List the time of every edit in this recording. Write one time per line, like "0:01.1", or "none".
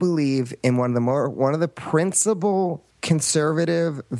0:02.9